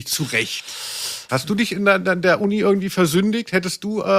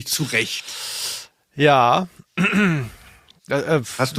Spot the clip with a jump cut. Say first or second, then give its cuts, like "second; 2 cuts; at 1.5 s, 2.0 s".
first; 1 cut; at 1.3 s